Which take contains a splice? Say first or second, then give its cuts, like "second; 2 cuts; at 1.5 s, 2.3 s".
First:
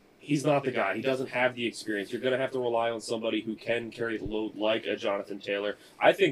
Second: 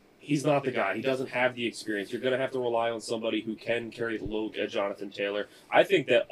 second; 1 cut; at 4.5 s